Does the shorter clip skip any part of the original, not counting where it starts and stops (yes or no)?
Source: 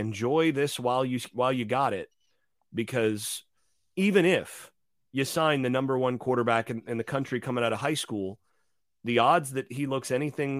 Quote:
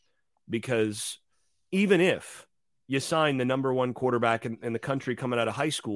no